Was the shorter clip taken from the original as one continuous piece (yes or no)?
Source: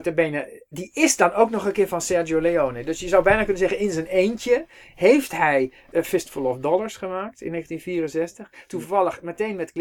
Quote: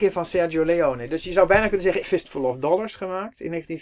no